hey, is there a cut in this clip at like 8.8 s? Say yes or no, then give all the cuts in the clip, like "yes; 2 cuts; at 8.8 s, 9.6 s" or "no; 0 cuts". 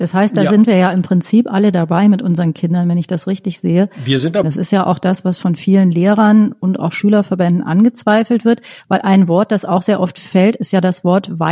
no; 1 cut; at 4.4 s